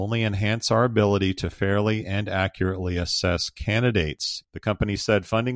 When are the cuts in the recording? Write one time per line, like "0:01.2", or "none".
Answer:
0:04.4